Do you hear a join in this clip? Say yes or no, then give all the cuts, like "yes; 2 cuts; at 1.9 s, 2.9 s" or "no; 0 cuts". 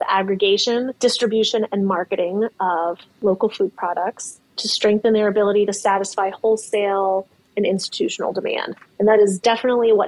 yes; 1 cut; at 1.0 s